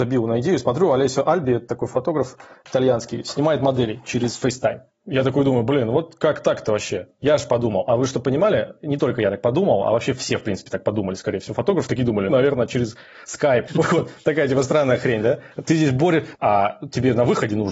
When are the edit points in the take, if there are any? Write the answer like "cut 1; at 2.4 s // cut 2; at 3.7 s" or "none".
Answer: cut 1; at 12.3 s // cut 2; at 13.7 s // cut 3; at 16.4 s